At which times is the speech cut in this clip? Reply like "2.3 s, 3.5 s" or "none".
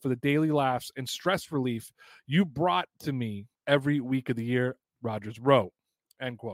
3.6 s, 4.8 s